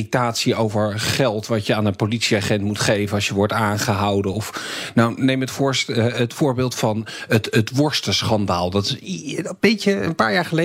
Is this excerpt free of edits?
yes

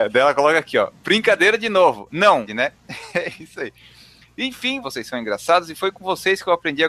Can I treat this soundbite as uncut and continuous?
no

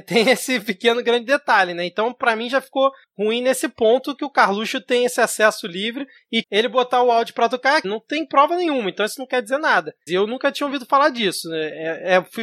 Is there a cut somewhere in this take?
yes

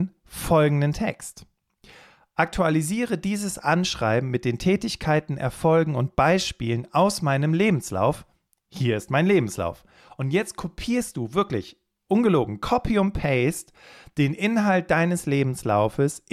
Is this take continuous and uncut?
yes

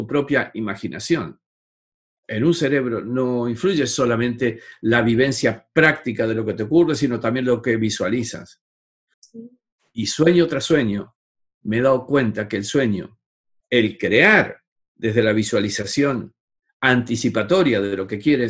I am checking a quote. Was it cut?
yes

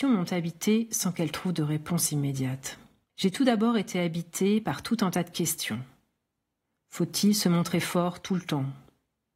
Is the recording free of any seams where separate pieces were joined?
no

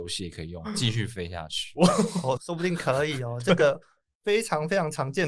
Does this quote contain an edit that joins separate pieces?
yes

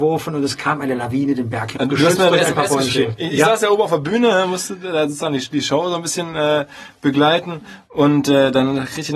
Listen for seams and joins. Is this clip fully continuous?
no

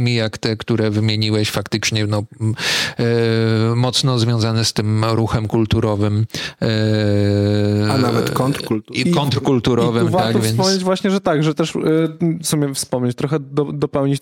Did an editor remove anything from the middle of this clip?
no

